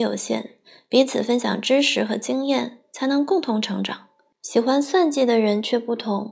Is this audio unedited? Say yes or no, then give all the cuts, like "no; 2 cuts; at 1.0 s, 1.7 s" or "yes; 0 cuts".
no; 1 cut; at 4.3 s